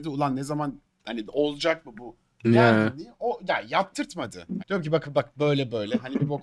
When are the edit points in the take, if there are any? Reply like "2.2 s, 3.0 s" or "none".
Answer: 4.6 s

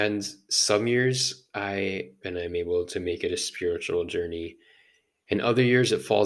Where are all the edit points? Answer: 2.2 s

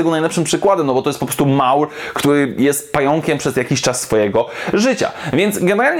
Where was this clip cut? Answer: none

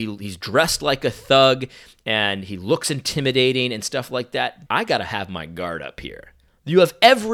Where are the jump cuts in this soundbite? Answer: 4.7 s

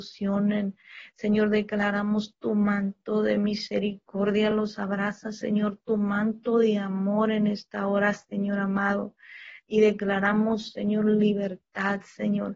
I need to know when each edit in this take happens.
none

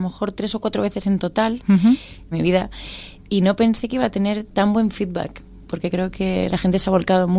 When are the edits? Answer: 2.3 s, 6.5 s

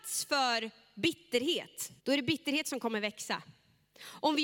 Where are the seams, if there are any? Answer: 2.0 s

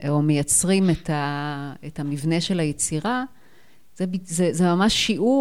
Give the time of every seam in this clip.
none

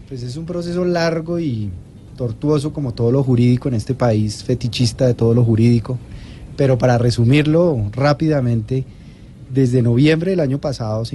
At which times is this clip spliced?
none

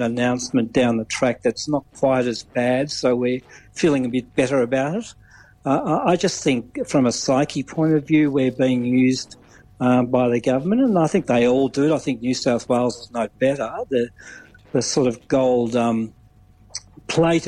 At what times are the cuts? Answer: none

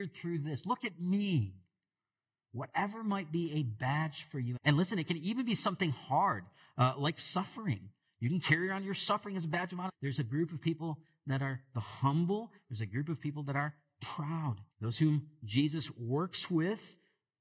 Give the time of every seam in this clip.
4.6 s, 9.9 s, 14.7 s

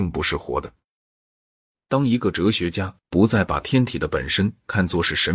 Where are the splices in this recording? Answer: none

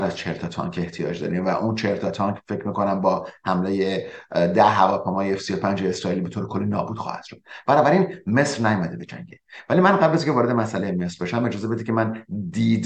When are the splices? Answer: none

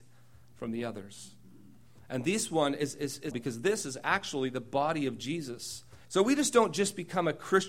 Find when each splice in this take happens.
3.3 s, 6.1 s

